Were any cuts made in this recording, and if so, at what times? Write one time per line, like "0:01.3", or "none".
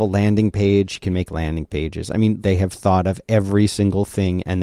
0:02.4